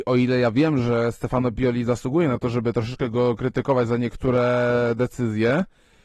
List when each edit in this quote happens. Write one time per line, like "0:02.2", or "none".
none